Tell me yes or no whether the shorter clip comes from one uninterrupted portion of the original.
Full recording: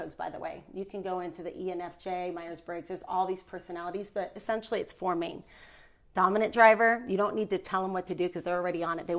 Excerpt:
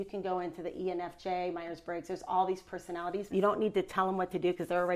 no